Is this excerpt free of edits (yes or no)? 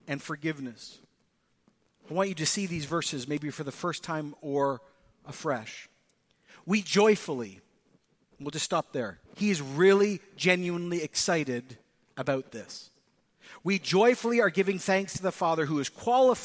no